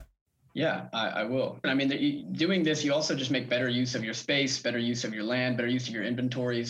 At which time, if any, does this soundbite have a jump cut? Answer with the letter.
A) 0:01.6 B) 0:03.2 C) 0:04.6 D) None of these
A